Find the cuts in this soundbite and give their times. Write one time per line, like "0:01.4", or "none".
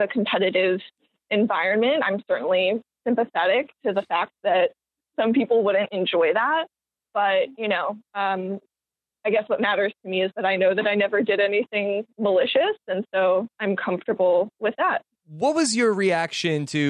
none